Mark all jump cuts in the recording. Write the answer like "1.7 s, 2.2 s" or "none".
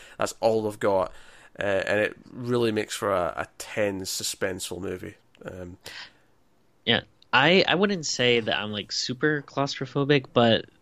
none